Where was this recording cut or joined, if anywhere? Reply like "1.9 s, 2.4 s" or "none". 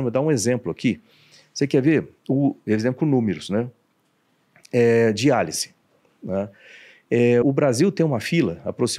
7.4 s